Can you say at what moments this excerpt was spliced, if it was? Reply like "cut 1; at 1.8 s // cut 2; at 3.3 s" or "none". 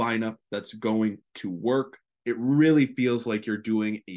cut 1; at 2.2 s